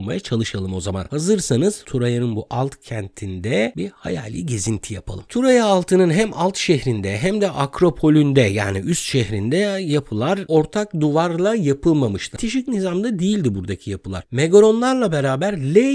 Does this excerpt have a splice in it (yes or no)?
no